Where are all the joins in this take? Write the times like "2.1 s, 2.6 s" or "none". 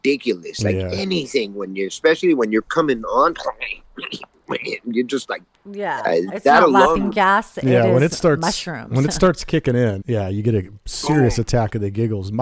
10.0 s